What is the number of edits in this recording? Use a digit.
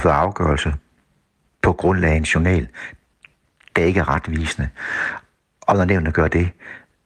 0